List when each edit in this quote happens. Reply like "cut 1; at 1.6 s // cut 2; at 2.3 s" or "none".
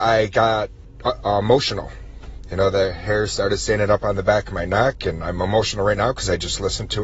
none